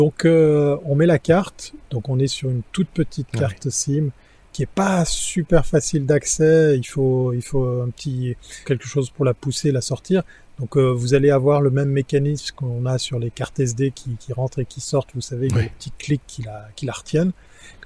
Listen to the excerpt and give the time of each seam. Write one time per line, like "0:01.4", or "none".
0:01.8
0:08.6